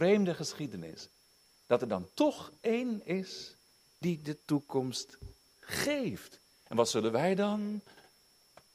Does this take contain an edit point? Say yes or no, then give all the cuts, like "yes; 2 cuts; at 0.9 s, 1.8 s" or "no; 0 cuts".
no; 0 cuts